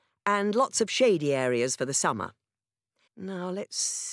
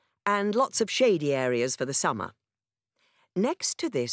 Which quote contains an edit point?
first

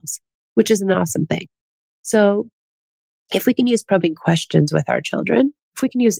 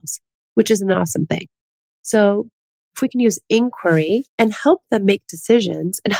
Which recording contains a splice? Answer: second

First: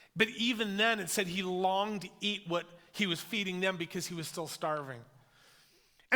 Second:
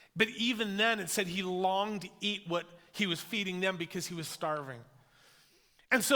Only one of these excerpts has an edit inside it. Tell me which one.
second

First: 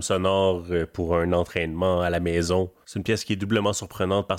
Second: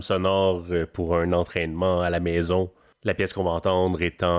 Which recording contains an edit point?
first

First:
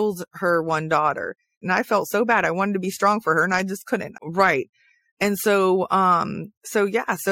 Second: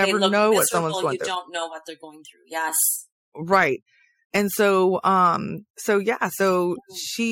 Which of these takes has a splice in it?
first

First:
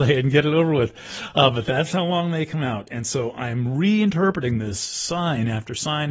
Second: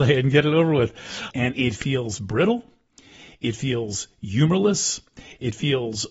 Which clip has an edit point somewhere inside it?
second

